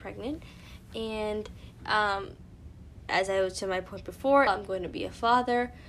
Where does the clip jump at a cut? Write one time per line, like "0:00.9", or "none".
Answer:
0:03.1
0:04.5